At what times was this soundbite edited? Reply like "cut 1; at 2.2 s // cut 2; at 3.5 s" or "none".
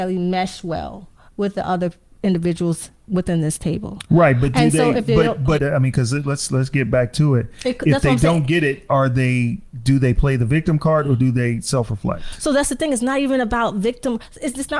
cut 1; at 5.6 s